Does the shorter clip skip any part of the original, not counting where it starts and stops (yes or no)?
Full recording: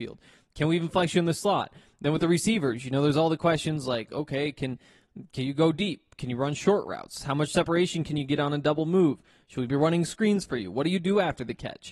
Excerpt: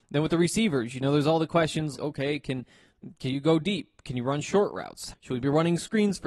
yes